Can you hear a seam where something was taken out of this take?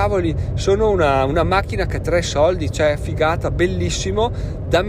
no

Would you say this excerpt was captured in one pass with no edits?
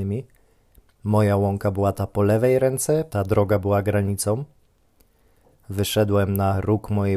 no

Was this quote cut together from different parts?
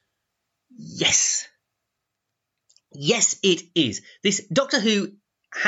no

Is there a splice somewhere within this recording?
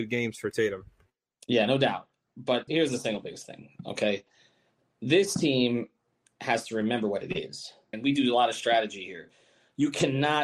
yes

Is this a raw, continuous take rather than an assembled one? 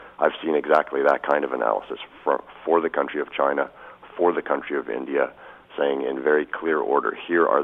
yes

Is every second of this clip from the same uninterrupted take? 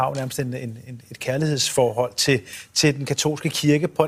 yes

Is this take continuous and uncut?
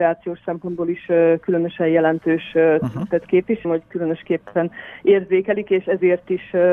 no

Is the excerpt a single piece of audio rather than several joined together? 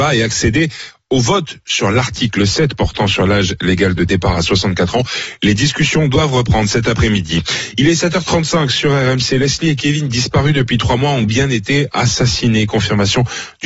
yes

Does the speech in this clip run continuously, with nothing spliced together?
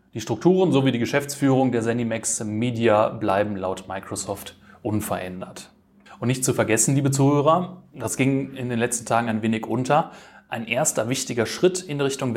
yes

